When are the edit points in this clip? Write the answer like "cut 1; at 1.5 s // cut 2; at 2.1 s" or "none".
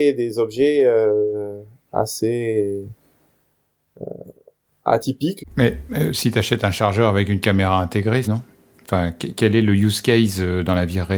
cut 1; at 5.4 s // cut 2; at 8.2 s